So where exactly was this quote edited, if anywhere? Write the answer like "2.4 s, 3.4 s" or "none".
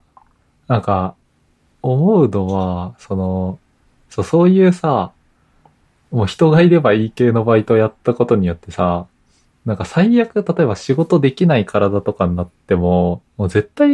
none